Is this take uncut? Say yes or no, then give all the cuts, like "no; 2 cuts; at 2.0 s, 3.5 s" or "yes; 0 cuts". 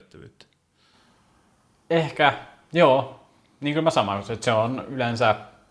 yes; 0 cuts